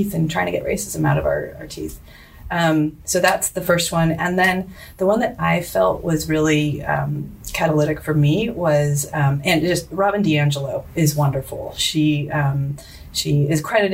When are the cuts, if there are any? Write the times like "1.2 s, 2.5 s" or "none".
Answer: none